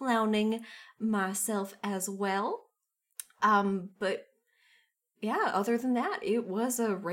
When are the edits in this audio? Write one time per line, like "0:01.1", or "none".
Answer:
none